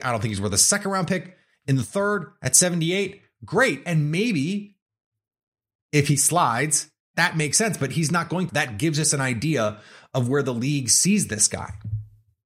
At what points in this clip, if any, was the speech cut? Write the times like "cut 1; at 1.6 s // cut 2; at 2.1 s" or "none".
cut 1; at 8.5 s